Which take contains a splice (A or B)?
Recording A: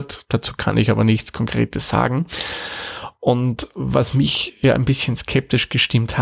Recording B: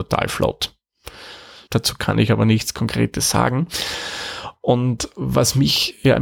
B